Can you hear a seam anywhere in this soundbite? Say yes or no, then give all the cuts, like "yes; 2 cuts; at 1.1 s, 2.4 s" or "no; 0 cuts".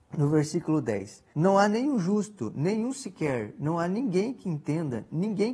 yes; 1 cut; at 1.3 s